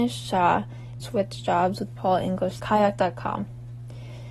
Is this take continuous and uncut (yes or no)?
no